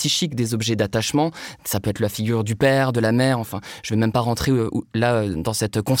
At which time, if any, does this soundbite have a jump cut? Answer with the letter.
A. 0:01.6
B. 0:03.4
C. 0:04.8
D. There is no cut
D